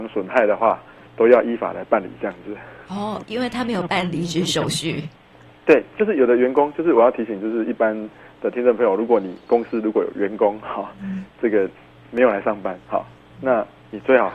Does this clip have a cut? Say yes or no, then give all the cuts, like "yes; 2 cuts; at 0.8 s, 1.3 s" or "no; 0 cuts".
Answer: no; 0 cuts